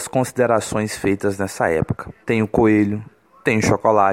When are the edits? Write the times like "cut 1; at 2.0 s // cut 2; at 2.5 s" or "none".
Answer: cut 1; at 2.2 s